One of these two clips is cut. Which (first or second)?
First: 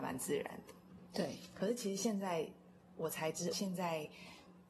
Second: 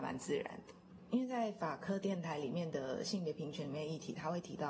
first